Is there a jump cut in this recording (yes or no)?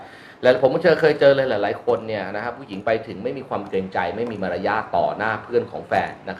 no